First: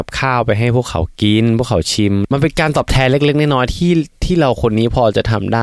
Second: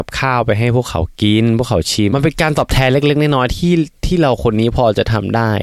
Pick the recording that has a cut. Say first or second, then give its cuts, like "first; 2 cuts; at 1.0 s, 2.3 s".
second; 1 cut; at 2.1 s